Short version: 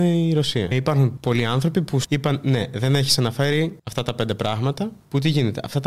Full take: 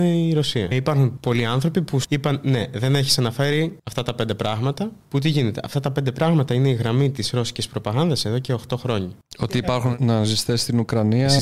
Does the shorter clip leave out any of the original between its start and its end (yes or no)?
no